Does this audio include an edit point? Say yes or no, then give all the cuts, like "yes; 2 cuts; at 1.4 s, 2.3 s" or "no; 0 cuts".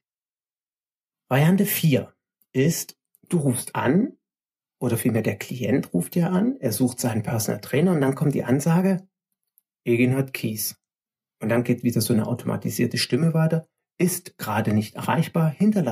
no; 0 cuts